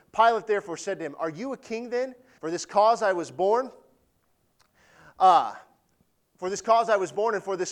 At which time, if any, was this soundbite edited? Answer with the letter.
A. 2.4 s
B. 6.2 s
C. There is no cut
A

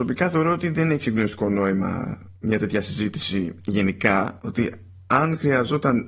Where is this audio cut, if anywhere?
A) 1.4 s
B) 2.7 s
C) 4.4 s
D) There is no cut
C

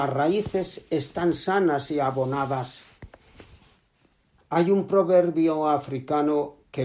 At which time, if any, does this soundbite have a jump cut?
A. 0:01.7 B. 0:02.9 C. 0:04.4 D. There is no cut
C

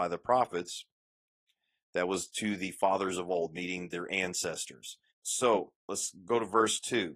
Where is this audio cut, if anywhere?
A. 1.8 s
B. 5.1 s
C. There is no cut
B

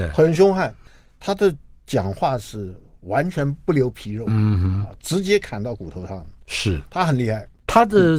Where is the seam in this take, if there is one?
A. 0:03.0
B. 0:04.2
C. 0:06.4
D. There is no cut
D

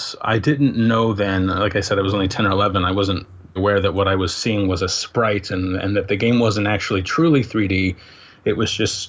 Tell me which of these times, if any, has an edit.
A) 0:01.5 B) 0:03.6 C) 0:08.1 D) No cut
B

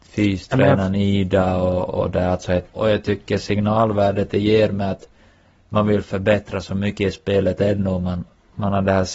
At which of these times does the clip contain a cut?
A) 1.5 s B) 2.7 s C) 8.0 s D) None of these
B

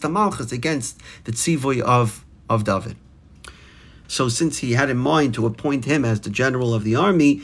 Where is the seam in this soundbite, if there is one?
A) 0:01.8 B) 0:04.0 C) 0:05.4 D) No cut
B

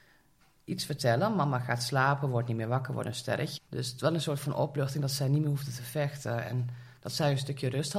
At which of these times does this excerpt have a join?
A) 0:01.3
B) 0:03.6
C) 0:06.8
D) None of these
B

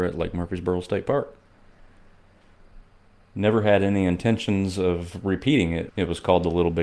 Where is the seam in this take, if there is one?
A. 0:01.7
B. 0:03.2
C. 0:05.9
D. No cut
C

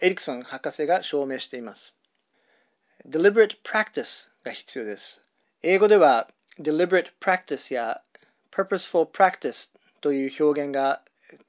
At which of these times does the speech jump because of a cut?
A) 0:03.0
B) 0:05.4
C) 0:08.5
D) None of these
B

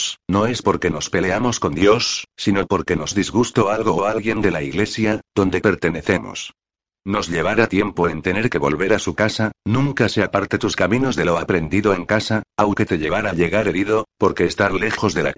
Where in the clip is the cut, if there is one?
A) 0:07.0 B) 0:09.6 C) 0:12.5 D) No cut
B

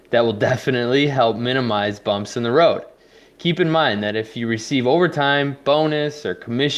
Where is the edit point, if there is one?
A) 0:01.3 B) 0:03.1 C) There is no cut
C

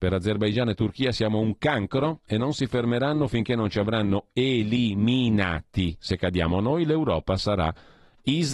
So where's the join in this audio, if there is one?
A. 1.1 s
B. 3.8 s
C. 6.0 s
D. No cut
C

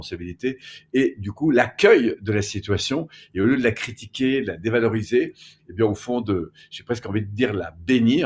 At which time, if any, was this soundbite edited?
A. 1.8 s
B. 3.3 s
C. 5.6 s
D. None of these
D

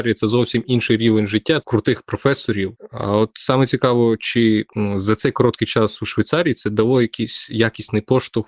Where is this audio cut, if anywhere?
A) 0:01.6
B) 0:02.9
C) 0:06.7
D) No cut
A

